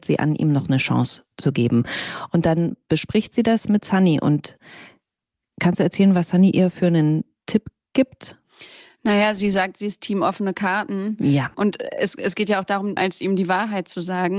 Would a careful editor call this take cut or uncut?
cut